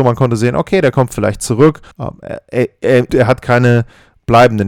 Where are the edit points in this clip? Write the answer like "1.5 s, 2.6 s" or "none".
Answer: 1.9 s, 3.1 s